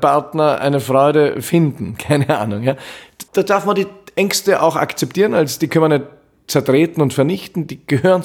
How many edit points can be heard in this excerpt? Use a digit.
1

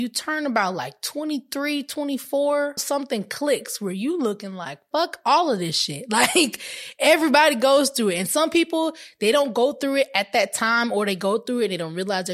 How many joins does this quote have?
1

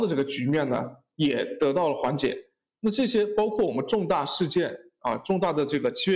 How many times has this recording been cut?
0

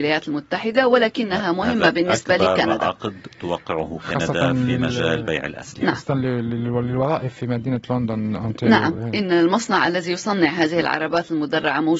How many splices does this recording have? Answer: 0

